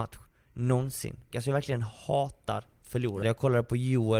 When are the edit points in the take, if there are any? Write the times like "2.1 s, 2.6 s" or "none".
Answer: 1.3 s, 3.2 s